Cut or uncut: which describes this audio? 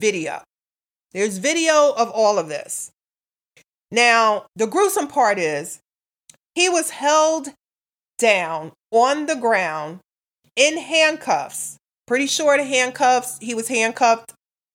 cut